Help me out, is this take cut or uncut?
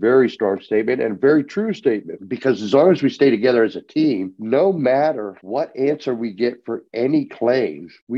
uncut